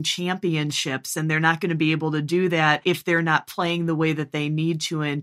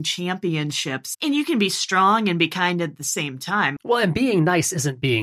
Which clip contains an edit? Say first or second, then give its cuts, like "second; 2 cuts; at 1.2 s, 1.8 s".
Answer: second; 2 cuts; at 1.1 s, 3.8 s